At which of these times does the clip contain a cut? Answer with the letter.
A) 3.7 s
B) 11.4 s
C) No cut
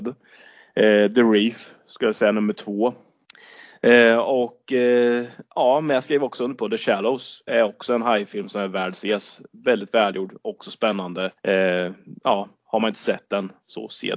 B